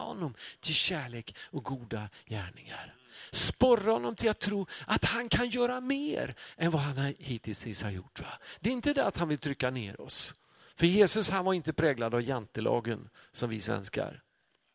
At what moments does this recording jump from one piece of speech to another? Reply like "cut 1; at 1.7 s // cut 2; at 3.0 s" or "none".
none